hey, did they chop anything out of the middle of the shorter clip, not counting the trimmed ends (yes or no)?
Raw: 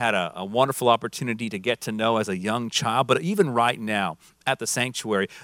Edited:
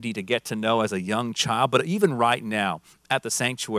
no